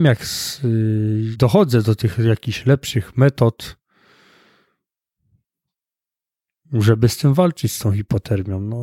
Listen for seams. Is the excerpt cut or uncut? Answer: cut